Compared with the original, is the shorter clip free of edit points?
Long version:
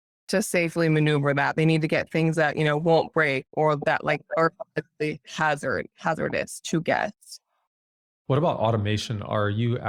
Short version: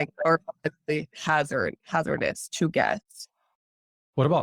yes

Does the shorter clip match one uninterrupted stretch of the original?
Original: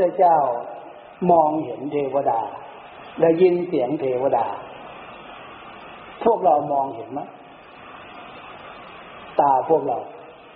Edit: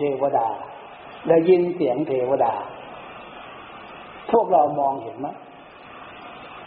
yes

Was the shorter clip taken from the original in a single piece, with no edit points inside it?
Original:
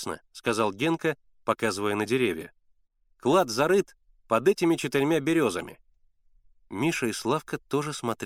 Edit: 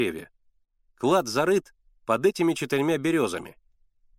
yes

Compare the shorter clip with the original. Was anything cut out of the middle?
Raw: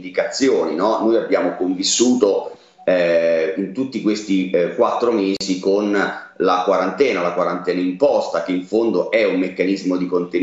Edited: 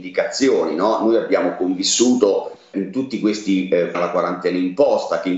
yes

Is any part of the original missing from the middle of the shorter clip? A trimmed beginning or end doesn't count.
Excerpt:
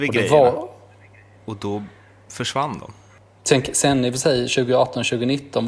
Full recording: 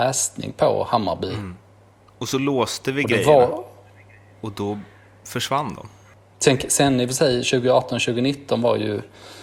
no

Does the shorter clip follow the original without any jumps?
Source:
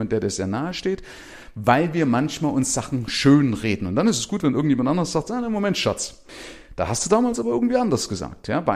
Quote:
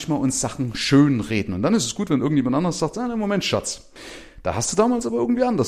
yes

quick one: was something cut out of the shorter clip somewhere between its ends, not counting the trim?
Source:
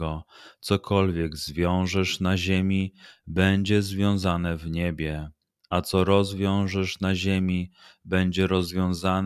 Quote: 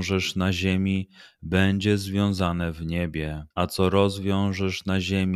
yes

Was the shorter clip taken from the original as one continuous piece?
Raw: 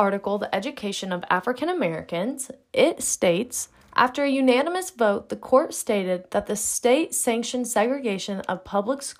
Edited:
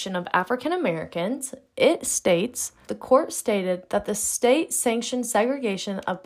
no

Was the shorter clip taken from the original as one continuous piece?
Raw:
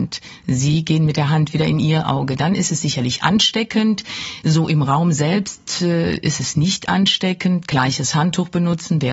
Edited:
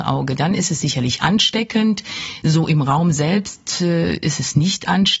yes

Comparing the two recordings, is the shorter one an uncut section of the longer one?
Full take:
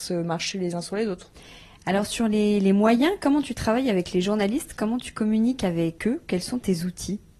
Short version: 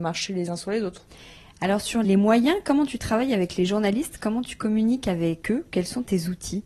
no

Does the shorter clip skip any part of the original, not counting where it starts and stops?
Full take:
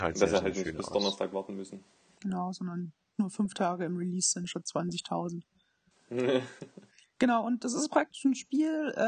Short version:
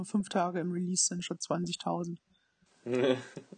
no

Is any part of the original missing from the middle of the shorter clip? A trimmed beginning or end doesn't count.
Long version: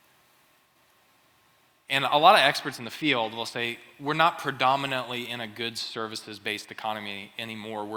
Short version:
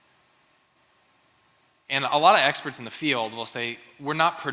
no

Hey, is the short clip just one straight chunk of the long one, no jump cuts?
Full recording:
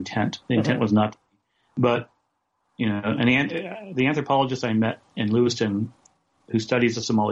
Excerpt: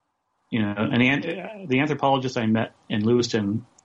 yes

